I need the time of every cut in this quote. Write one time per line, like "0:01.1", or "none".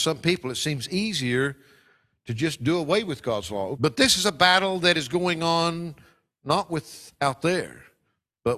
0:03.7